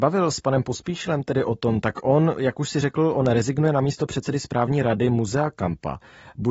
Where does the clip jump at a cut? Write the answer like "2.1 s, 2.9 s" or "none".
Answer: none